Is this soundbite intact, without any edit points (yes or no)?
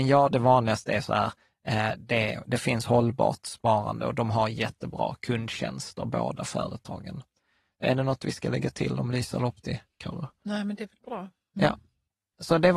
yes